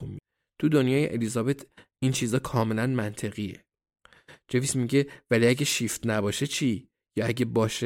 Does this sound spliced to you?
no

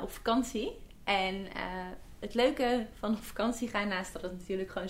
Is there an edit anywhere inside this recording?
no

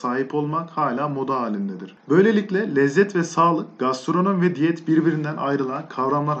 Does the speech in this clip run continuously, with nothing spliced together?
yes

